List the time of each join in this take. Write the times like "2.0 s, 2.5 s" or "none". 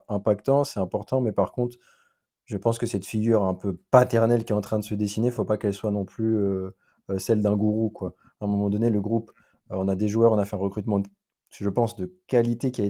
none